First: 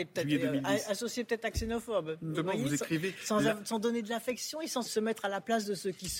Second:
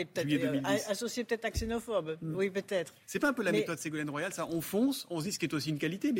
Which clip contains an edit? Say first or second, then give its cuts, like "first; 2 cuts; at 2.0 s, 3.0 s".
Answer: first; 2 cuts; at 2.3 s, 4.8 s